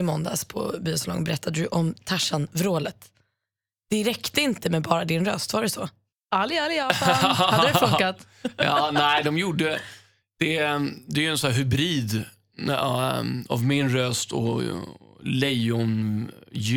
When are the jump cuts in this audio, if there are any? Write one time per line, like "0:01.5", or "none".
none